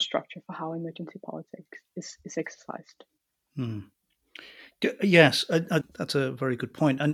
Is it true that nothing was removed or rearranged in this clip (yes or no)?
no